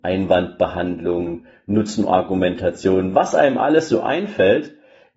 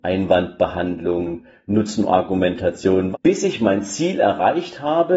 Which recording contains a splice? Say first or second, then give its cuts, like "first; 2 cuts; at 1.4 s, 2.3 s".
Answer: second; 1 cut; at 3.1 s